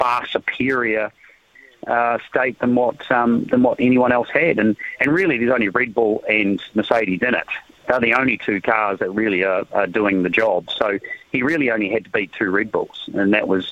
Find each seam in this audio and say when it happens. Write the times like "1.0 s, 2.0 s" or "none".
none